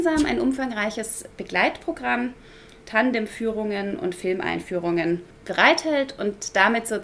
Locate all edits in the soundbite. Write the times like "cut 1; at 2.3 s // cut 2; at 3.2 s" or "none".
cut 1; at 2.8 s